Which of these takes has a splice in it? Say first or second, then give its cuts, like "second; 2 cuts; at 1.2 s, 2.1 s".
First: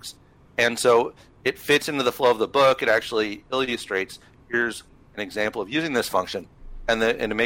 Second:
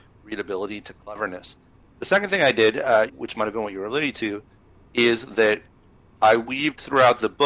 second; 1 cut; at 3.1 s